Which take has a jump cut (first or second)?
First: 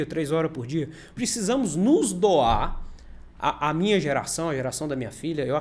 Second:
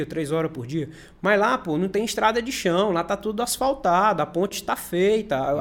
first